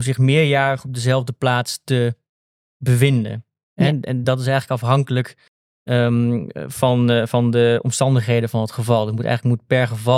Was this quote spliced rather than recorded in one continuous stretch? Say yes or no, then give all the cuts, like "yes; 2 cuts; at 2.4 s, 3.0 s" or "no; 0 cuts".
no; 0 cuts